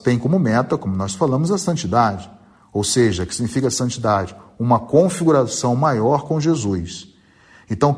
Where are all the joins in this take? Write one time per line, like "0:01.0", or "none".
none